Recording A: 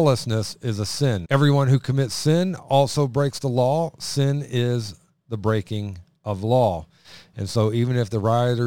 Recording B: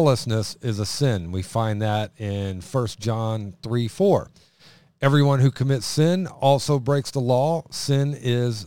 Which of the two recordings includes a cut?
A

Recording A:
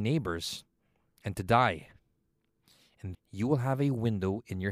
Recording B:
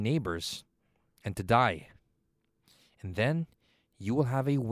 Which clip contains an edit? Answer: A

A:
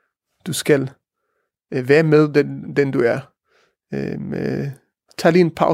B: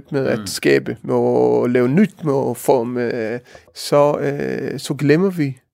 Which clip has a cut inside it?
B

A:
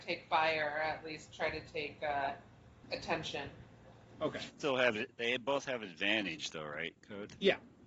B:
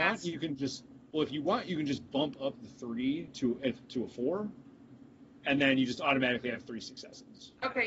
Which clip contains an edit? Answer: A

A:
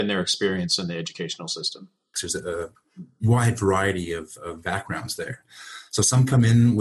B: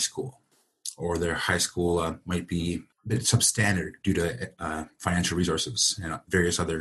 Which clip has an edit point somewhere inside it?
A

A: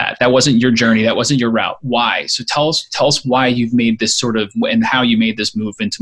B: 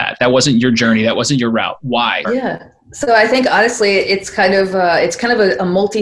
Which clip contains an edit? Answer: B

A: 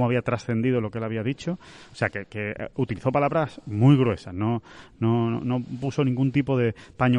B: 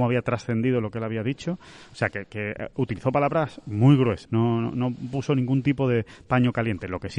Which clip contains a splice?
B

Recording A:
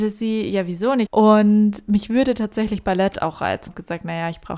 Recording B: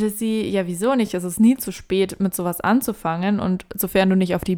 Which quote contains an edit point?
A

